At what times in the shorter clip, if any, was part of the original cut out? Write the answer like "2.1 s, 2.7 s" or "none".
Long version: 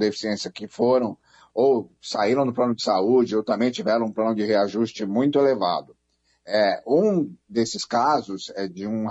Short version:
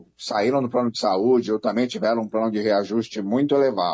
none